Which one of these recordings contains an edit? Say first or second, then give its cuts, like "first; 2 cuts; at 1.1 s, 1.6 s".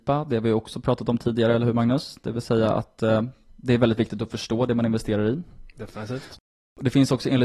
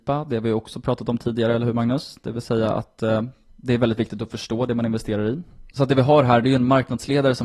second; 1 cut; at 5.7 s